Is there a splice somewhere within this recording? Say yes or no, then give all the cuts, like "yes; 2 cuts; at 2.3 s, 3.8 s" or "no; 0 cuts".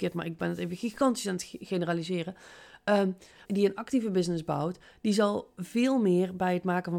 yes; 1 cut; at 3.4 s